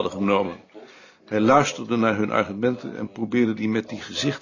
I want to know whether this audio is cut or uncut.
uncut